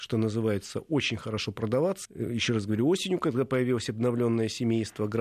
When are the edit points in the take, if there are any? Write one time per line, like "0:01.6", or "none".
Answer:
0:02.0